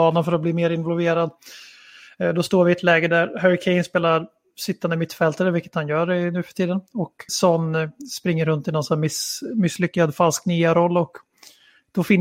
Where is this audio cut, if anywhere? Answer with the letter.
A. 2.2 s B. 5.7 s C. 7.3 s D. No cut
C